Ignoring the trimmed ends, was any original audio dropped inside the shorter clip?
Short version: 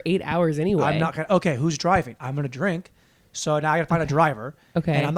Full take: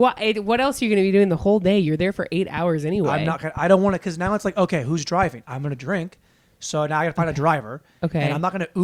yes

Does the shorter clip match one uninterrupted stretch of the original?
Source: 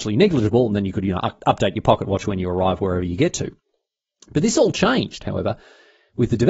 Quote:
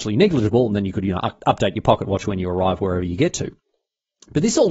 yes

